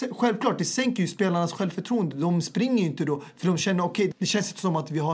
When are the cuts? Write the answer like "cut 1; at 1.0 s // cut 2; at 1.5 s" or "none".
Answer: cut 1; at 4.1 s